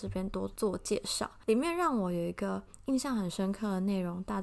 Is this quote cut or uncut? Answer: uncut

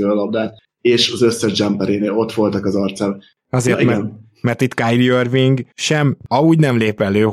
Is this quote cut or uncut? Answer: cut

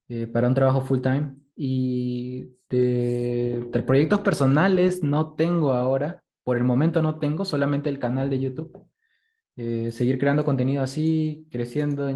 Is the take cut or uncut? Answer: uncut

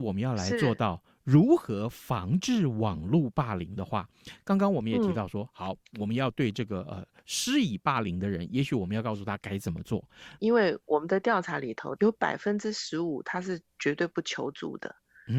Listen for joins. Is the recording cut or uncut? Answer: cut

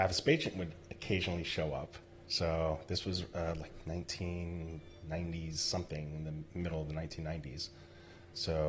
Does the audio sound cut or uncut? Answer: uncut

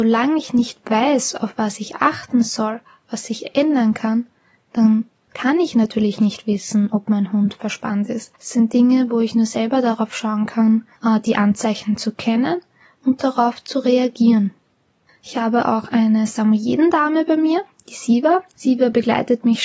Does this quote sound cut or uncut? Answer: uncut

